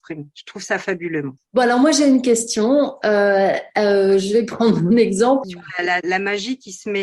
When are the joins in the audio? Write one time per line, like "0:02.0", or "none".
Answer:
0:01.4
0:05.4